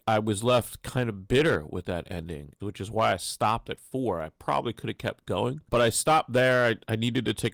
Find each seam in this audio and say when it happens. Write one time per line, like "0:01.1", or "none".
0:02.6
0:05.7